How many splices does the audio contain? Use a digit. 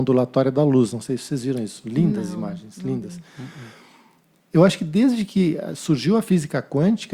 0